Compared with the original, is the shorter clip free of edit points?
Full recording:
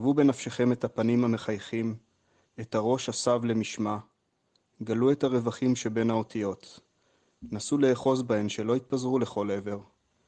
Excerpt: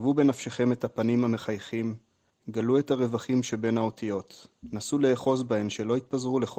no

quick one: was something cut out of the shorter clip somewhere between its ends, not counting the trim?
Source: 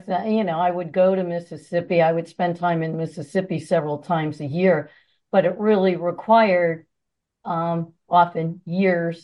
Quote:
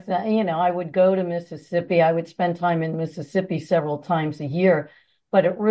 no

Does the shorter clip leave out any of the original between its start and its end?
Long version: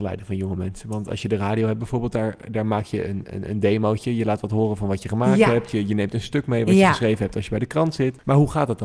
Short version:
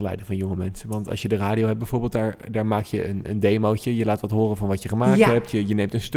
yes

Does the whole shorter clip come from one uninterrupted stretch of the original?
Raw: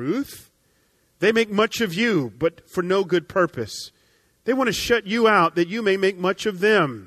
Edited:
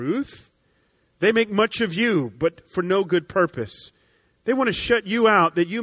yes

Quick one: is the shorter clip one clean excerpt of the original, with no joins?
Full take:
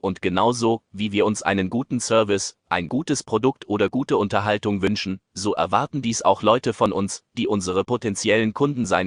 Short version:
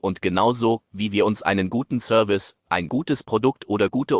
yes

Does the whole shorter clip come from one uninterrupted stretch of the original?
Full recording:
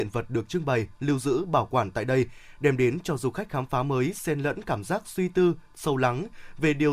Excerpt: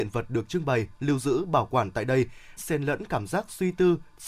no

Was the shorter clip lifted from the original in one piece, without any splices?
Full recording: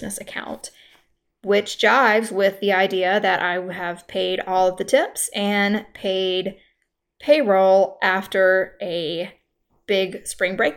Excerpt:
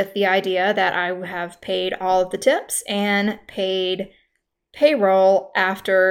yes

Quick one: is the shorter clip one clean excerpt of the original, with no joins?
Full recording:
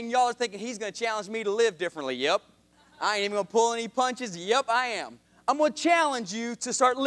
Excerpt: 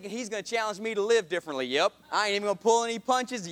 no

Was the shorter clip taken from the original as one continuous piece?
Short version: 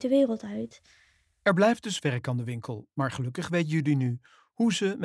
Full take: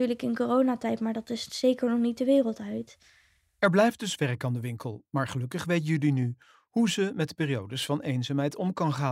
yes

